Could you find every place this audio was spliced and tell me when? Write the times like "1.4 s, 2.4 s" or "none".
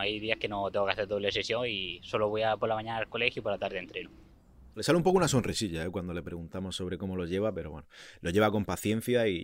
4.7 s